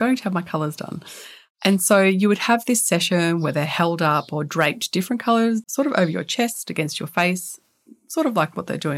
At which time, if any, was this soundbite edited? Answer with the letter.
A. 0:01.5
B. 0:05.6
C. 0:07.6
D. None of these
B